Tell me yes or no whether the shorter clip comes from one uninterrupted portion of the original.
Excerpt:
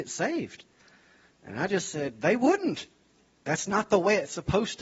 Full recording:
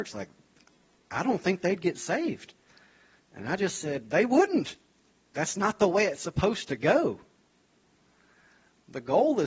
yes